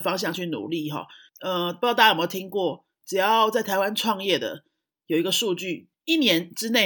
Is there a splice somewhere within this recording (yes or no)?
no